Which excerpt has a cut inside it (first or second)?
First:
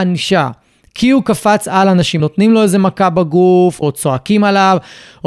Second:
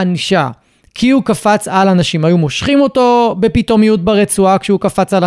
first